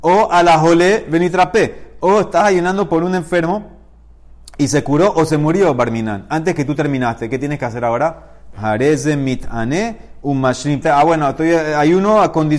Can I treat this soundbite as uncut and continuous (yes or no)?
no